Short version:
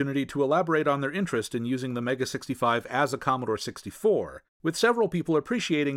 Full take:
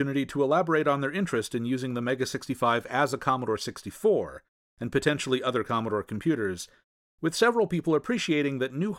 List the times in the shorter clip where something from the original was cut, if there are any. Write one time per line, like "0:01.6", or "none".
0:04.6